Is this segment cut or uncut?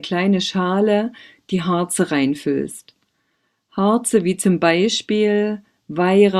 uncut